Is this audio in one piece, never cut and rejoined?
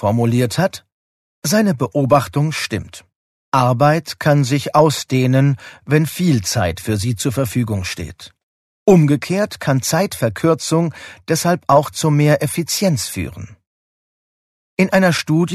yes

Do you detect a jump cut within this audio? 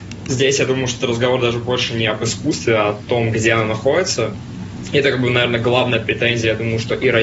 no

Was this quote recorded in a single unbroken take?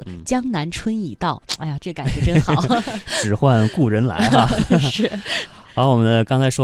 yes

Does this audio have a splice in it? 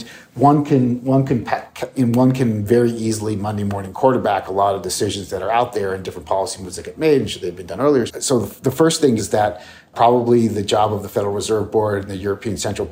yes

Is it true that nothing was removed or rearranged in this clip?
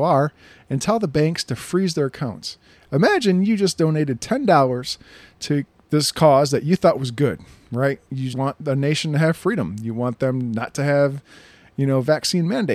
no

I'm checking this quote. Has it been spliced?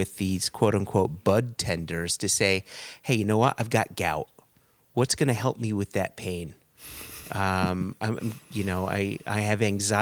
no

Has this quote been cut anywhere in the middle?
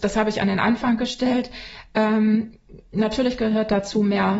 no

